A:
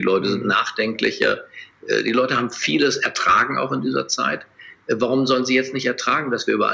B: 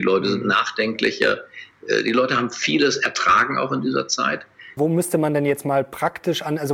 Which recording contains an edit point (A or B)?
B